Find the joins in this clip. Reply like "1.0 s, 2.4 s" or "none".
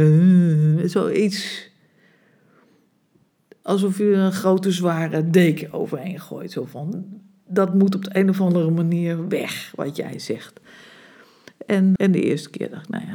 12.0 s